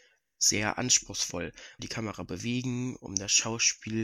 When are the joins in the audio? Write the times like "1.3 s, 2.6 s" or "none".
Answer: 1.8 s